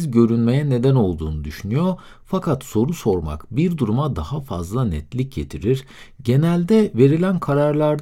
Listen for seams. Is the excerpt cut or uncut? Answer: uncut